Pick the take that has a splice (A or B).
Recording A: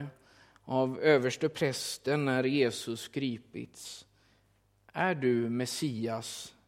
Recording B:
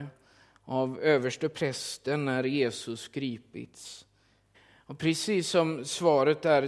B